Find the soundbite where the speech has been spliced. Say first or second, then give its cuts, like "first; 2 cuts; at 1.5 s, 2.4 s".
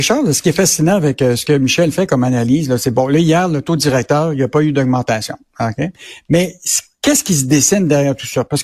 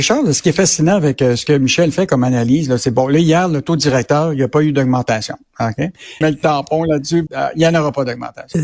second; 2 cuts; at 6.2 s, 7.3 s